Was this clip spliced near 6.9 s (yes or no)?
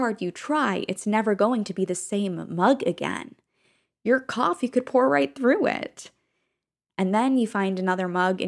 yes